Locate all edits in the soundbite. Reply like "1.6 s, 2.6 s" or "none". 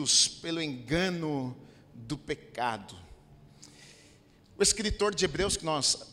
none